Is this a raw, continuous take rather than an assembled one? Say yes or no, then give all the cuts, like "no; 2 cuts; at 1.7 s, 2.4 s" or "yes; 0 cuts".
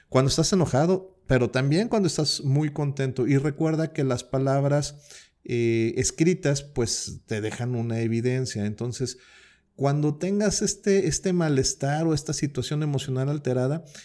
yes; 0 cuts